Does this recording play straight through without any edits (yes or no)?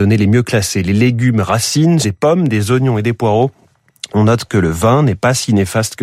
no